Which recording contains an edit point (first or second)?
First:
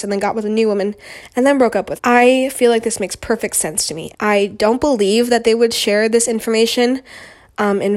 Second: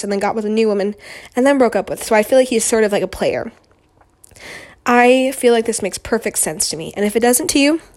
first